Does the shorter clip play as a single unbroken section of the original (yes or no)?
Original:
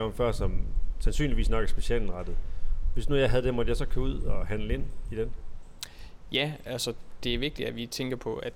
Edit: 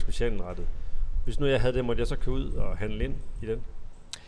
yes